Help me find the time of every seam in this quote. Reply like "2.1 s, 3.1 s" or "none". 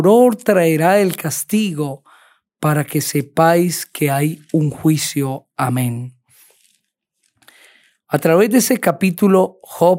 none